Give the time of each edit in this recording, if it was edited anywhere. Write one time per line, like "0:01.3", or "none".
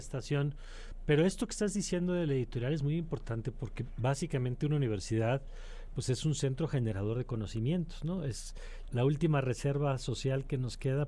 0:08.9